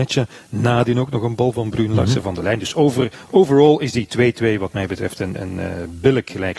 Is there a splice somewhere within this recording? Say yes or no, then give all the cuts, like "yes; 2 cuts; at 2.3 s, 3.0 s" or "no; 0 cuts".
no; 0 cuts